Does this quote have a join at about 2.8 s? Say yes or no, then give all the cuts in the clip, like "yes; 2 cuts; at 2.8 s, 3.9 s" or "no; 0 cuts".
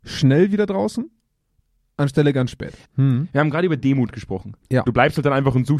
yes; 2 cuts; at 2.8 s, 4.9 s